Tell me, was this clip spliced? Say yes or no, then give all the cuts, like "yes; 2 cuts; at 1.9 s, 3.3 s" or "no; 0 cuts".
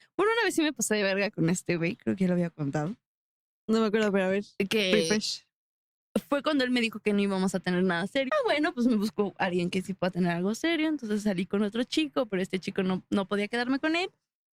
yes; 1 cut; at 8.3 s